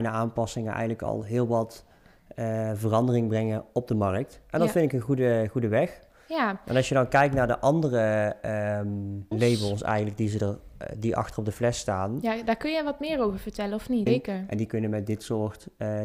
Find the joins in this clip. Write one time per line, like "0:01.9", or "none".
0:09.3
0:14.1